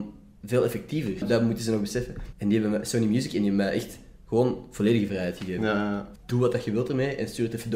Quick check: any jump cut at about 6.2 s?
yes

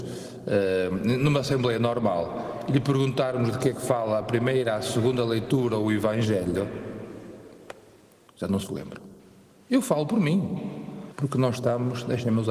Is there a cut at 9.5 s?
no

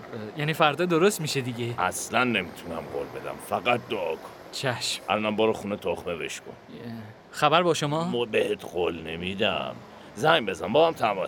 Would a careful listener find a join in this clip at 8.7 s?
no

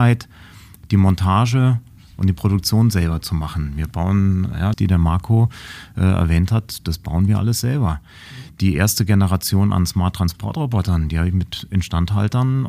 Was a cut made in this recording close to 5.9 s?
no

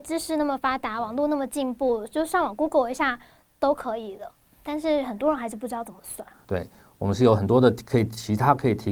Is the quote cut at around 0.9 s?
no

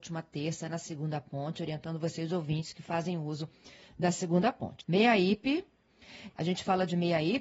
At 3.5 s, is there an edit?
no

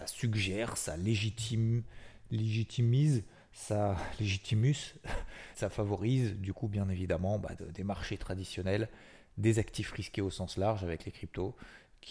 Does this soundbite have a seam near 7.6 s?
yes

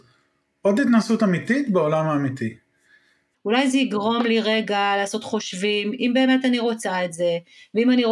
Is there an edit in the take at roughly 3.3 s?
yes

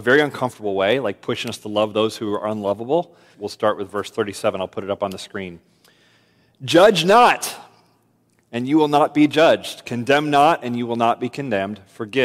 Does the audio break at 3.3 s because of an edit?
yes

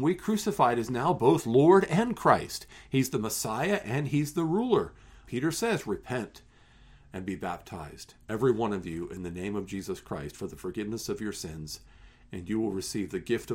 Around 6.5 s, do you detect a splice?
no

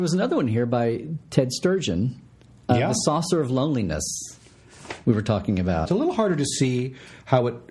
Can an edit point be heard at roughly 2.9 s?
no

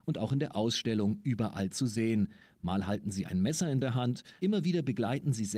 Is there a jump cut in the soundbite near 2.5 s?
no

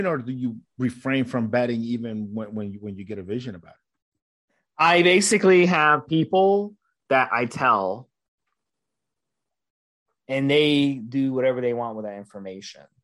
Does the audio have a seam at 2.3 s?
no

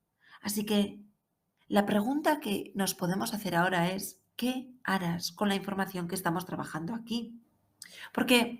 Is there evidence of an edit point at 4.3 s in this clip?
yes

